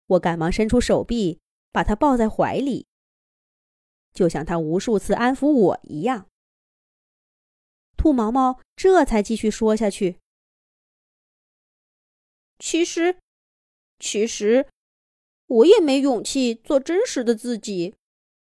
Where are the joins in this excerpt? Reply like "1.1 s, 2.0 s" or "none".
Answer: none